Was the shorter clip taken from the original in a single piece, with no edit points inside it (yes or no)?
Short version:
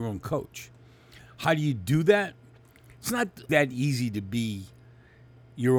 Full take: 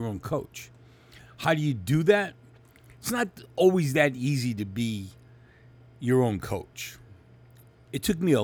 no